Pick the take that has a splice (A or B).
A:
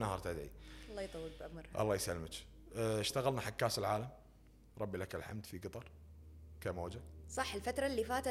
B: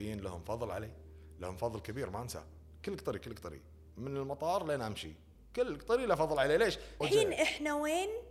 B